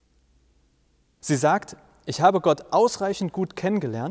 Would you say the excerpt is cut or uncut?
cut